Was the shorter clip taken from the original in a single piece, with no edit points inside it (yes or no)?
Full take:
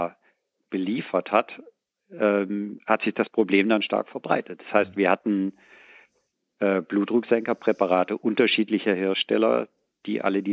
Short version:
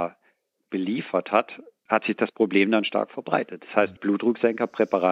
no